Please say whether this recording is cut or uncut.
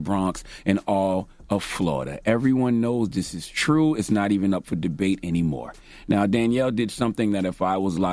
uncut